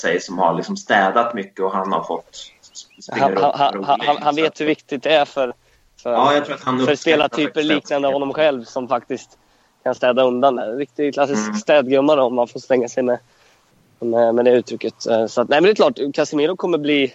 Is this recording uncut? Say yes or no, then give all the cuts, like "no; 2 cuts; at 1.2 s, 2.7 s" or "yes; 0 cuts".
yes; 0 cuts